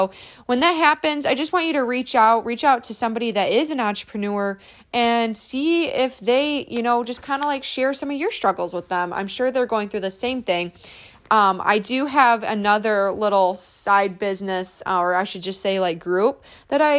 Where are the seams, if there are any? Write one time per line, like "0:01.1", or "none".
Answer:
none